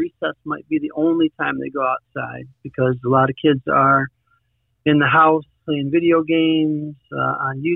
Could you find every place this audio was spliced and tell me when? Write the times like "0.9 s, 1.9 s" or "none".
5.6 s